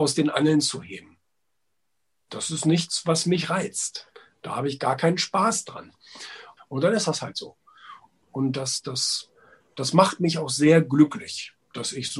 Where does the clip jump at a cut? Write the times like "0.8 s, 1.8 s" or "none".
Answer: 6.6 s, 8.2 s